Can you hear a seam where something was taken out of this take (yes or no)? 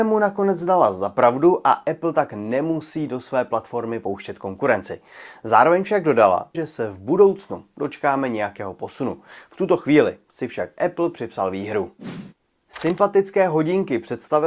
yes